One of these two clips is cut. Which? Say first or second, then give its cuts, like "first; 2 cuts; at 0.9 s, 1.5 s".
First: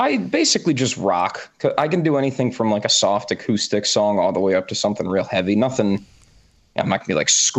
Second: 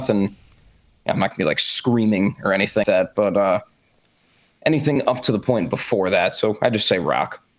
second; 1 cut; at 2.8 s